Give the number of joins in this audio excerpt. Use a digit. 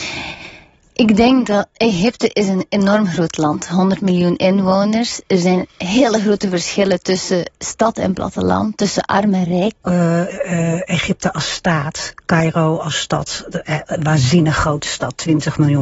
2